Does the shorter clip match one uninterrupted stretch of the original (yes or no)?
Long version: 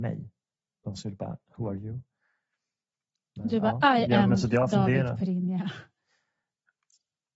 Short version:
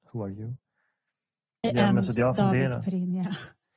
no